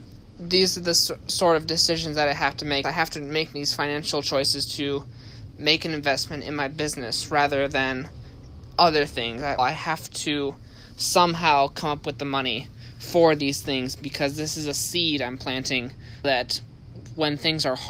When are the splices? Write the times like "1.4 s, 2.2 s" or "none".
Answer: 2.8 s, 9.6 s, 16.2 s